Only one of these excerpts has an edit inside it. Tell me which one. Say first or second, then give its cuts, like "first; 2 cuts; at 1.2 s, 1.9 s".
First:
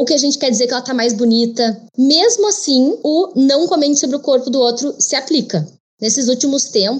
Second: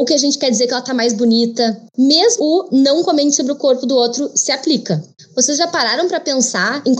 second; 2 cuts; at 2.4 s, 5.2 s